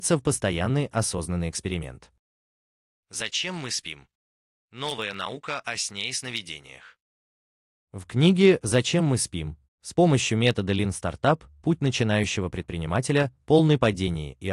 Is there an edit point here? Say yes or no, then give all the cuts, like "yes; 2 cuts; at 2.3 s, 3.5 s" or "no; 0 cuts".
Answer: yes; 1 cut; at 9.6 s